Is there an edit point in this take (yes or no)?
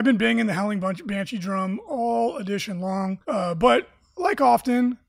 yes